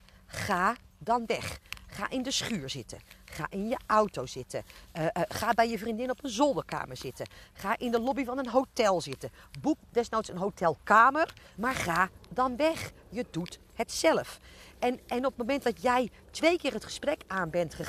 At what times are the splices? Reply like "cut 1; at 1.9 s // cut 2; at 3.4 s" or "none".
cut 1; at 11.5 s